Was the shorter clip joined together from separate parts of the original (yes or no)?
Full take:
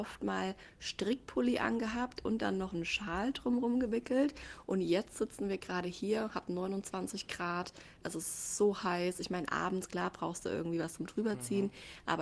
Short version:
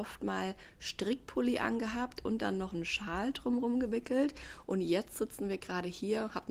no